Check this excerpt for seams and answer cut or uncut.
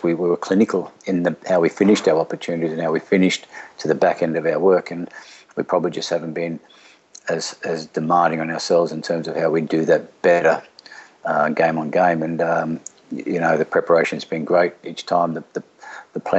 uncut